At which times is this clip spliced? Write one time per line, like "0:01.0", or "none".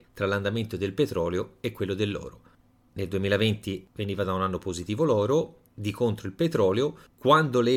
none

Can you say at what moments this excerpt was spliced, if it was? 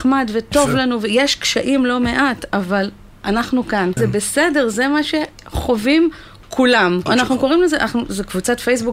0:04.0
0:07.1

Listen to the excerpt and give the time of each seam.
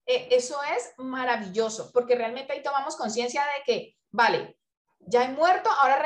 none

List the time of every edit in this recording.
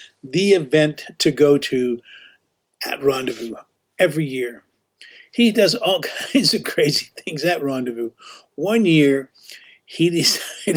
none

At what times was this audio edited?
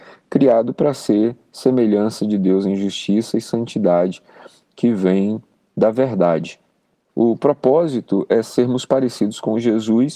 0:07.1

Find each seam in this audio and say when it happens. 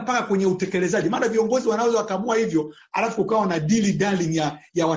none

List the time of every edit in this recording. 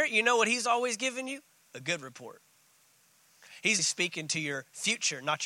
0:03.8

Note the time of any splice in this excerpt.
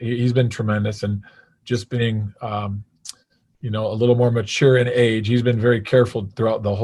none

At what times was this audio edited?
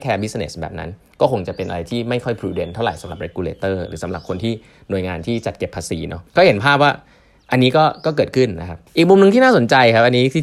0:06.3
0:08.9

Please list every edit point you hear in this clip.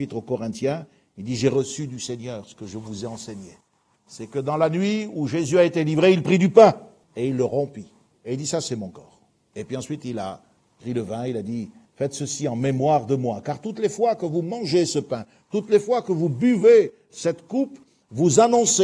none

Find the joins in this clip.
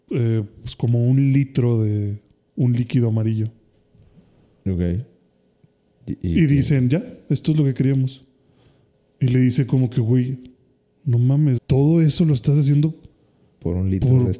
0:11.6

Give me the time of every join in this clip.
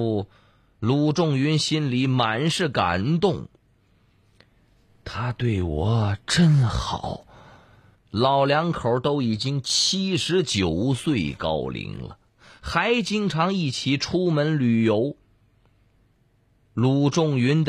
0:08.0

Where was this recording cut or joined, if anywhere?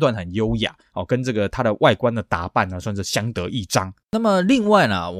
0:04.0

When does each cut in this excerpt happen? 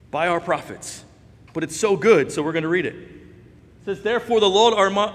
0:01.5

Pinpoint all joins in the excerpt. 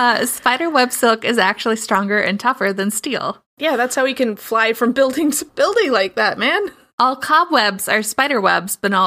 none

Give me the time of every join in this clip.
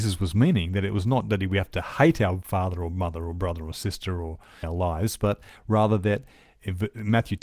0:04.6

